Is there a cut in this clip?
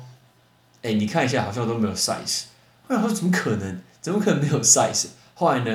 no; 0 cuts

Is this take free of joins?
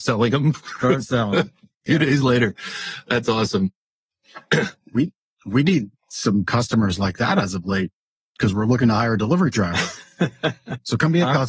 yes; 0 cuts

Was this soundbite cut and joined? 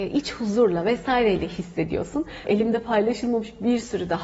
yes; 1 cut; at 2.4 s

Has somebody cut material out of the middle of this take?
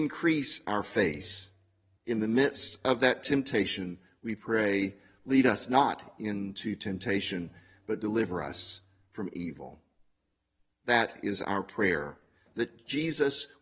yes; 1 cut; at 2.0 s

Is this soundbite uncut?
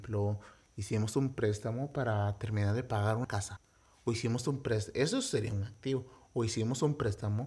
yes; 0 cuts

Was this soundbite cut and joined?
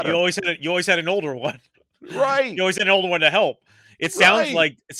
no; 0 cuts

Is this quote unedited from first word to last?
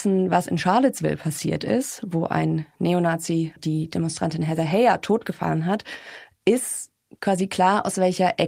no; 1 cut; at 3.6 s

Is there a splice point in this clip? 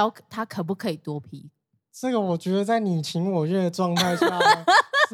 no; 0 cuts

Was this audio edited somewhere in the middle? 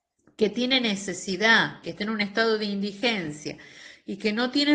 yes; 1 cut; at 1.8 s

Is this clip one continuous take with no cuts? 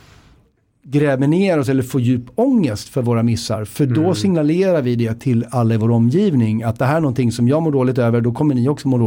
yes; 0 cuts

